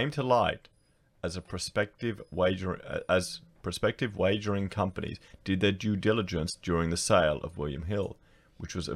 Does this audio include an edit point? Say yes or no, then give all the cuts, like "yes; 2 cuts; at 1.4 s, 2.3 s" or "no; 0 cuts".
no; 0 cuts